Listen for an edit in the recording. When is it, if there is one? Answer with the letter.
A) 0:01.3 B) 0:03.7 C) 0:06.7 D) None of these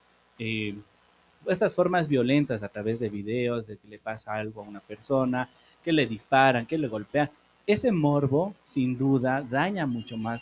D